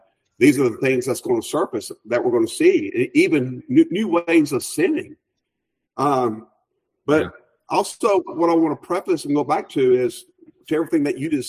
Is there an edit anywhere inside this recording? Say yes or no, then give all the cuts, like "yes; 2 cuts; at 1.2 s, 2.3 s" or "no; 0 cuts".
yes; 1 cut; at 3.6 s